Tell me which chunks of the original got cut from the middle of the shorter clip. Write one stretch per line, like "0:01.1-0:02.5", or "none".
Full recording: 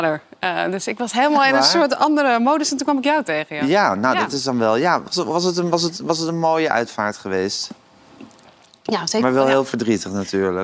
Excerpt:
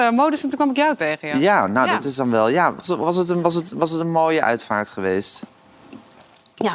none

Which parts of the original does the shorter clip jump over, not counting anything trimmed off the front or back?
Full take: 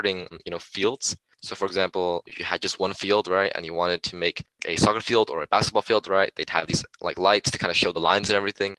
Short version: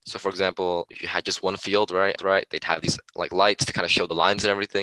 0:03.5-0:06.0

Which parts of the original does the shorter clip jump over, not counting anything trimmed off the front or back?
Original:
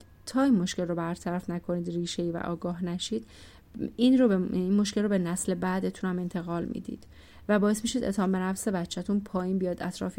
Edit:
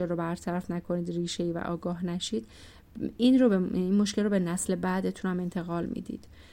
none

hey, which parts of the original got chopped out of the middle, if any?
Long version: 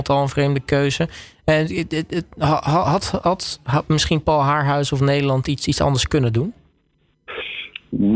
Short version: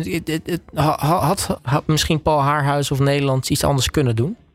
0:03.2-0:03.6
0:05.4-0:05.6

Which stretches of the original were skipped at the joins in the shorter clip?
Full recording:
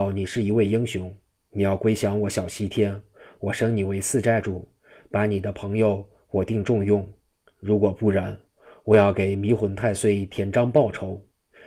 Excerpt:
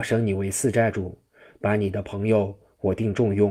none

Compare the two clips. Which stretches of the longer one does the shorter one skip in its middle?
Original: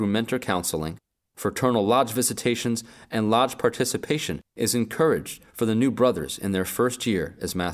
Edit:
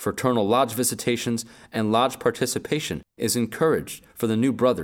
none

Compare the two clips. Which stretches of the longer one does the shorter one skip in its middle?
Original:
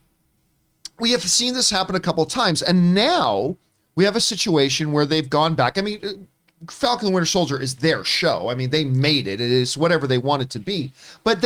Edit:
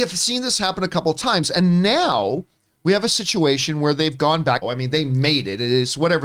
0:05.7-0:08.4

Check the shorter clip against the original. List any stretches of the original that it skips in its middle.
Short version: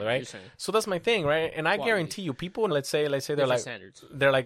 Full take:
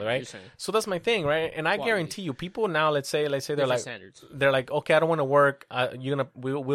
0:02.7-0:02.9

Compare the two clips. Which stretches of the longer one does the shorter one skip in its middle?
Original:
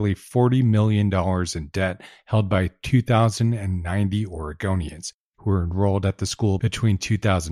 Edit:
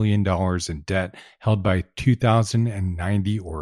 none

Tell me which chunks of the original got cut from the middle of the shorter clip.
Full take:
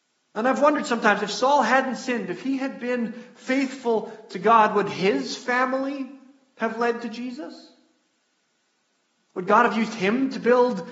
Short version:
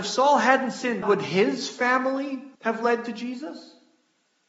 0:02.3-0:04.7
0:06.2-0:06.5

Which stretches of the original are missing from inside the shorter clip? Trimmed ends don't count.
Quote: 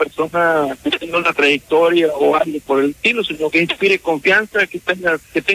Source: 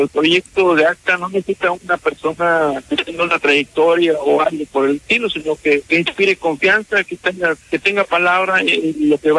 0:05.6-0:05.9

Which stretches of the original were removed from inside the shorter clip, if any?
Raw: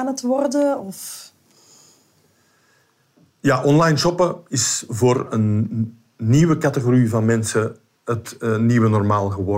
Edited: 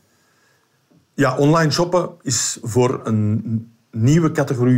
none

